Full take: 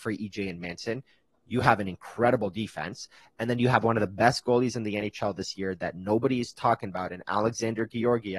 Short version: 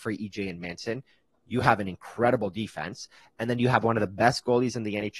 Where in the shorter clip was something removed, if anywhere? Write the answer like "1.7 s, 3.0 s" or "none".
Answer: none